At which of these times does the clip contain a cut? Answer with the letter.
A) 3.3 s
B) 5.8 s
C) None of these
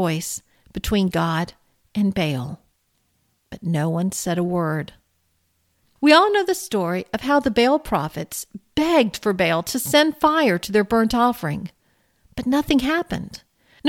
B